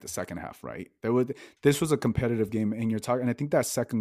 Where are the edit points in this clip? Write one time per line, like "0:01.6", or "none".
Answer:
none